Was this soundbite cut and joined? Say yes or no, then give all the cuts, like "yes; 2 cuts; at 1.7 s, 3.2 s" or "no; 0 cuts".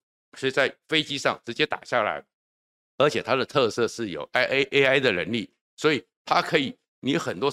no; 0 cuts